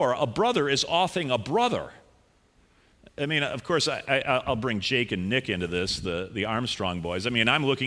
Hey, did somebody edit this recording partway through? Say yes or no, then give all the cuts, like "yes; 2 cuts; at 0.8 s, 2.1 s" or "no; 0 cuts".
no; 0 cuts